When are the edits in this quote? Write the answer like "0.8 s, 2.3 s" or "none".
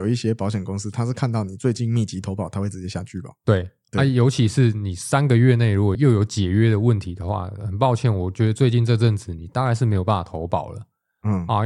5.9 s